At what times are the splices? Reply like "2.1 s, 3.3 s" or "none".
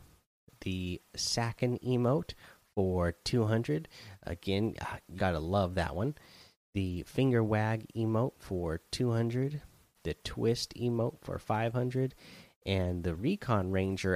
5.2 s